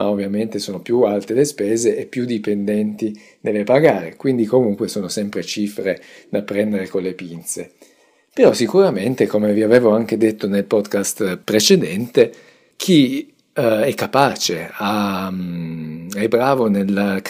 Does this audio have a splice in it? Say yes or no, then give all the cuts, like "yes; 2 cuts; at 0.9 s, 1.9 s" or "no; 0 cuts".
no; 0 cuts